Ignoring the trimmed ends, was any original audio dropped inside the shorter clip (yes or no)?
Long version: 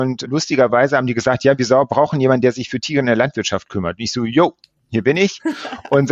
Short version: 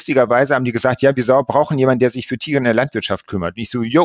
no